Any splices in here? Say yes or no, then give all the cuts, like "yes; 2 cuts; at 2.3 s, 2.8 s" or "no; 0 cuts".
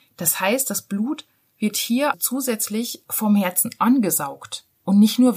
yes; 1 cut; at 2.1 s